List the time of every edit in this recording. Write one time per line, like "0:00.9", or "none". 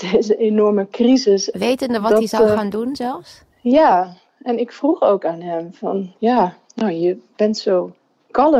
0:01.5